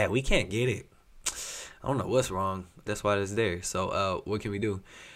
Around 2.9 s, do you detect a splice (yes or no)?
yes